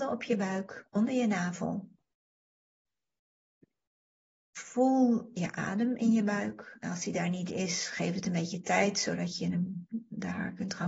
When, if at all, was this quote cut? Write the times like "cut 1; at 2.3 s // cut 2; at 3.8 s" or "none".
none